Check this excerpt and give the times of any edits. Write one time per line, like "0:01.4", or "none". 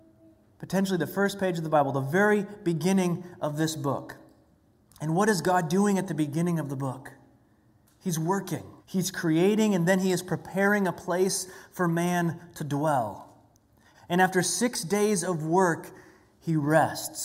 0:08.8
0:13.9